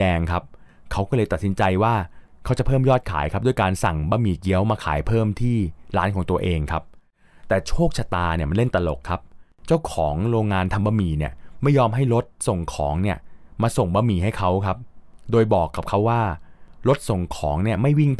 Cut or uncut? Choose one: uncut